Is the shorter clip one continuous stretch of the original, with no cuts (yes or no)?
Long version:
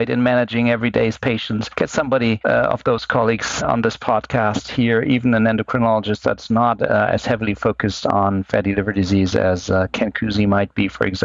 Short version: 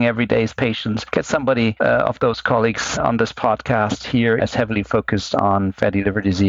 no